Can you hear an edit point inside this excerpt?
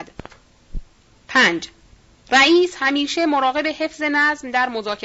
no; 0 cuts

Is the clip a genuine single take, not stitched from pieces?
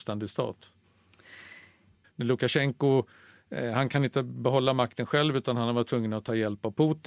no; 1 cut; at 2.0 s

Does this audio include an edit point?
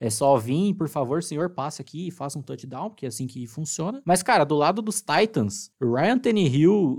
no; 0 cuts

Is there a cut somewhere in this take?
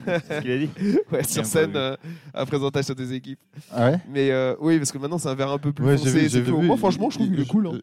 yes; 1 cut; at 6.4 s

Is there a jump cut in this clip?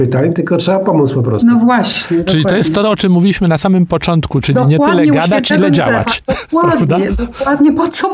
no; 0 cuts

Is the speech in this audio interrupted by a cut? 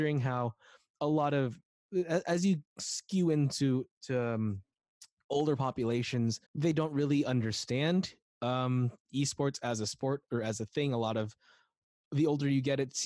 yes; 1 cut; at 6.4 s

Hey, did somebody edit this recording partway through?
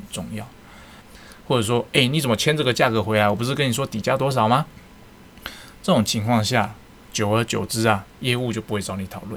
yes; 2 cuts; at 1.0 s, 8.1 s

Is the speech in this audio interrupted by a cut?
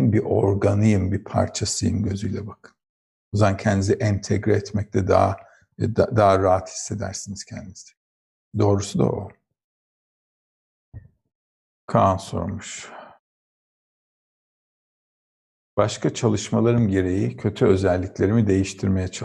no; 0 cuts

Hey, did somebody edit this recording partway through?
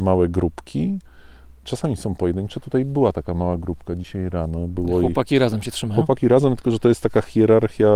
no; 0 cuts

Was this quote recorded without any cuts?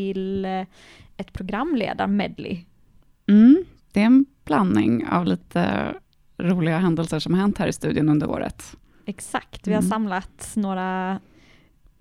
yes; 0 cuts

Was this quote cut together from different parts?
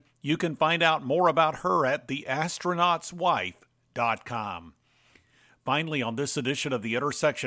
no; 0 cuts

